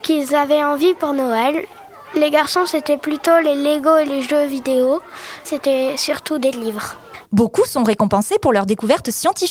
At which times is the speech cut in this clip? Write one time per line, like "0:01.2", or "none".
0:05.4
0:07.2